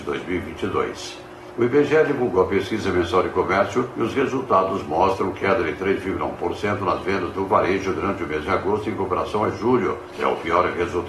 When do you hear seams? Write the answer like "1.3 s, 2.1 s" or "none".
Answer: none